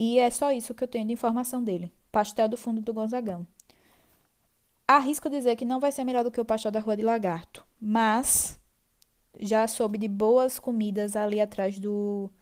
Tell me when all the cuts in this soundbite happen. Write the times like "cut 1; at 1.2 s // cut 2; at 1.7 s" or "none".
none

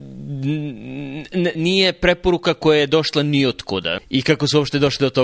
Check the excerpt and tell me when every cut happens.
cut 1; at 1.6 s // cut 2; at 4.0 s

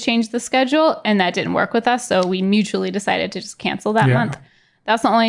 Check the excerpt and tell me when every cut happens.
none

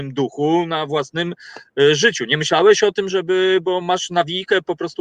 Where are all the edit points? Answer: cut 1; at 3.1 s

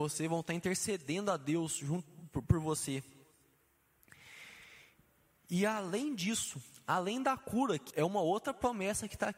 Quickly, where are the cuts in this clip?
cut 1; at 7.9 s

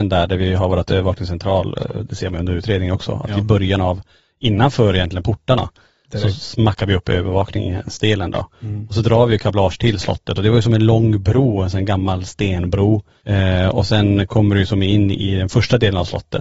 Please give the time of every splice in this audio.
none

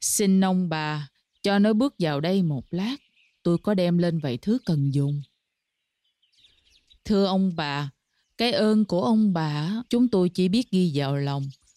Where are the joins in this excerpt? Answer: cut 1; at 7.0 s // cut 2; at 9.9 s

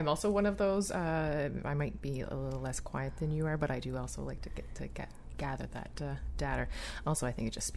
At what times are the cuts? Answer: none

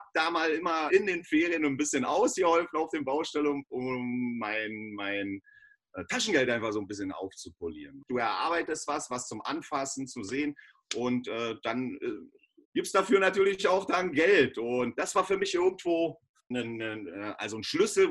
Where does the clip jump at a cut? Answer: cut 1; at 8.1 s // cut 2; at 12.6 s // cut 3; at 16.5 s

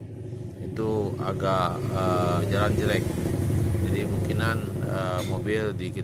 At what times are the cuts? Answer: none

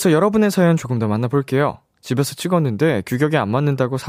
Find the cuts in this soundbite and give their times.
cut 1; at 1.9 s

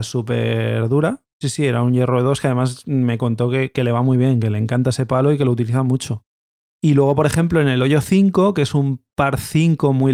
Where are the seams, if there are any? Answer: cut 1; at 1.4 s

